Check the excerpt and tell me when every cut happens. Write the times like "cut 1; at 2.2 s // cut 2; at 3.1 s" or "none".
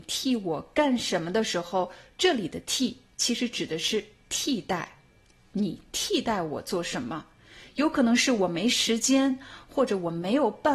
none